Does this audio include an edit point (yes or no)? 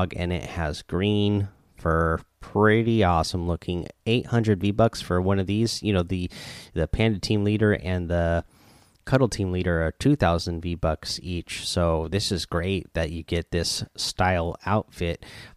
no